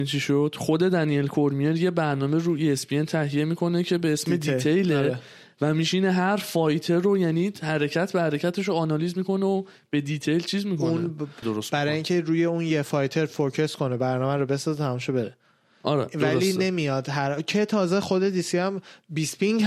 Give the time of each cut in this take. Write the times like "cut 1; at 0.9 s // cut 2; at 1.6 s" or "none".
cut 1; at 11.4 s